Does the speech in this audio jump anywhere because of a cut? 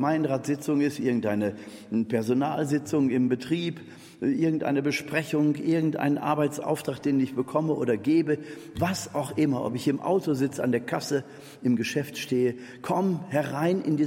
no; 0 cuts

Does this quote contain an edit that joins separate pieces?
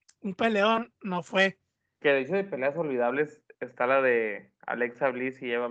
no; 0 cuts

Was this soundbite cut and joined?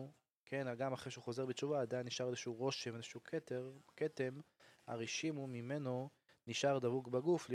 no; 0 cuts

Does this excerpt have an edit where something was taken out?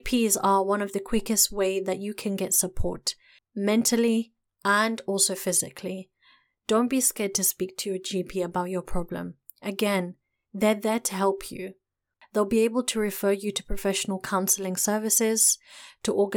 no; 0 cuts

